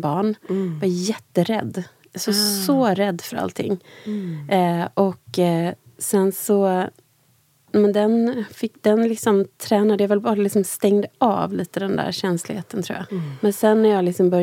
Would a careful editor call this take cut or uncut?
cut